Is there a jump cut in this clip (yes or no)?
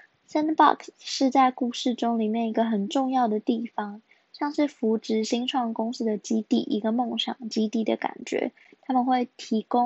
no